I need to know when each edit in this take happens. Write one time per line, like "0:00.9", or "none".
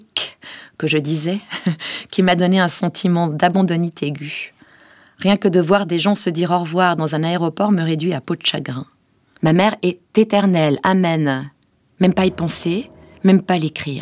0:09.4